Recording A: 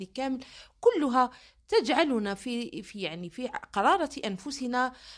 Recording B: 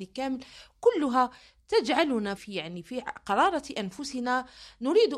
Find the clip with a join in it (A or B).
B